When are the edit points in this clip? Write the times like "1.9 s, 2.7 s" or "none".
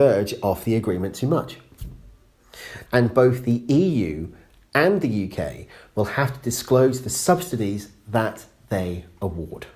2.8 s